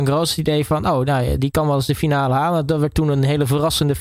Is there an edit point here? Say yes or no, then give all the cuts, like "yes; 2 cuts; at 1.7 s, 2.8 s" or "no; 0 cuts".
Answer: yes; 1 cut; at 1.4 s